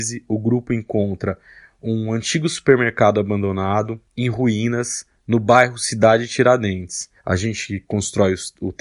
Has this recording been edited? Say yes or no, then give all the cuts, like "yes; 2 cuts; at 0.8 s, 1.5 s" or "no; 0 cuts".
yes; 1 cut; at 7.2 s